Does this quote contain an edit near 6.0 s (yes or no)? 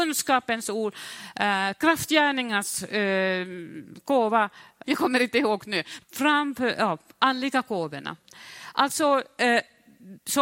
yes